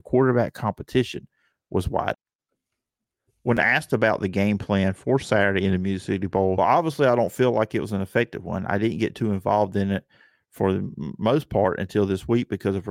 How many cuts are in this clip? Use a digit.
1